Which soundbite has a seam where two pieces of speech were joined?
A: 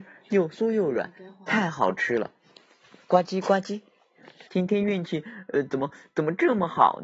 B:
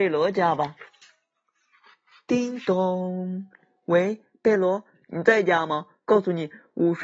A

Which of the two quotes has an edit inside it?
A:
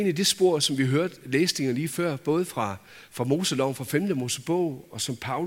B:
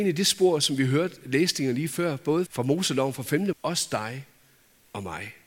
B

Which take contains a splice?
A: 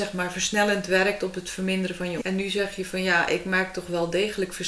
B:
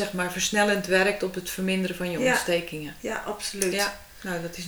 A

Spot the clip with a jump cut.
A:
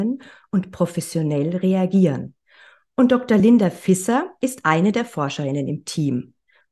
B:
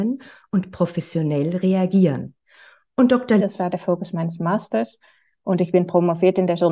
B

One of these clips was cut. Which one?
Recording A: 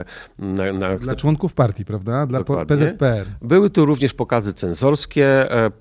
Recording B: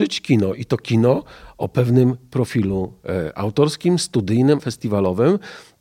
B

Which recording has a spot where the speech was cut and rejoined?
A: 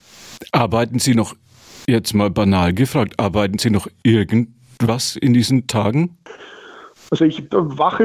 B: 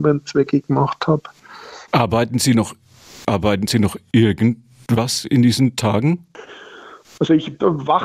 B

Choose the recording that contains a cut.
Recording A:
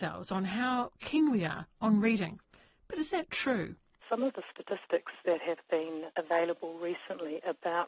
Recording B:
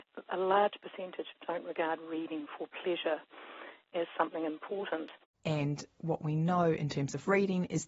B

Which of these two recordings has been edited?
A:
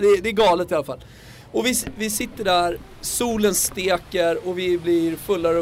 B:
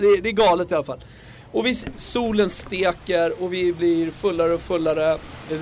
B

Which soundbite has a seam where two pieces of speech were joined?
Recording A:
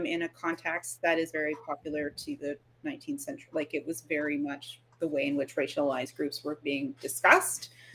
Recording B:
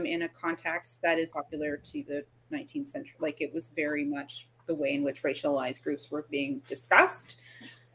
B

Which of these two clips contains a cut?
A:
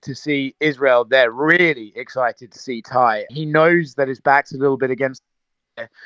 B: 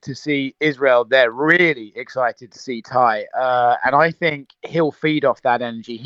A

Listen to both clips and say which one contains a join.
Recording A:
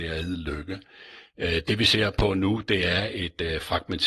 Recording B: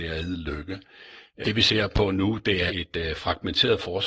B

